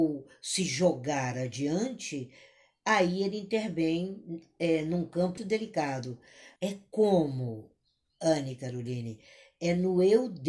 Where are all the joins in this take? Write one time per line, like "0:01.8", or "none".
0:05.4
0:06.6